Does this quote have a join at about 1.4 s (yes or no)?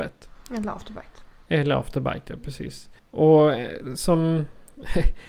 no